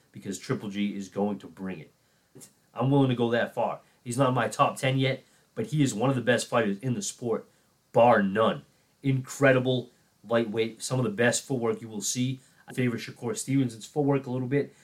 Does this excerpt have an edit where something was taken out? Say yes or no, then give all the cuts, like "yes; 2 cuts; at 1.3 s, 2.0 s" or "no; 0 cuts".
yes; 2 cuts; at 2.4 s, 12.7 s